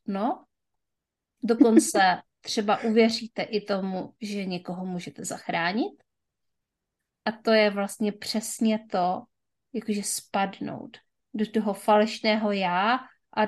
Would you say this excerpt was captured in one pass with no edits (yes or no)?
yes